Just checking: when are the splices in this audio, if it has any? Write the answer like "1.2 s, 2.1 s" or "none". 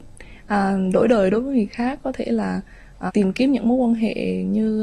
3.1 s